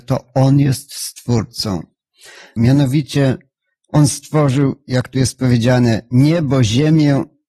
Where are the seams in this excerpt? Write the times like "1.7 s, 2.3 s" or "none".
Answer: 2.6 s